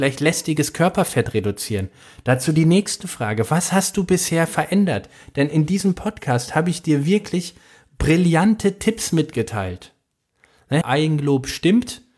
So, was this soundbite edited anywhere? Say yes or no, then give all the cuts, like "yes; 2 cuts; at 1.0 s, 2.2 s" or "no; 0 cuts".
yes; 1 cut; at 10.8 s